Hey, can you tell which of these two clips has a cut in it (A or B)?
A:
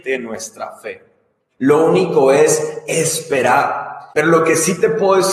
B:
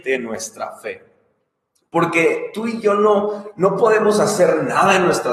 A